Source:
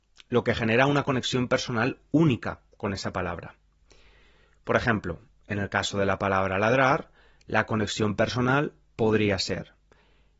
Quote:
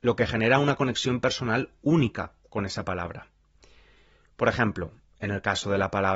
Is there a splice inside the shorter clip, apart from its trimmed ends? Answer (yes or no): no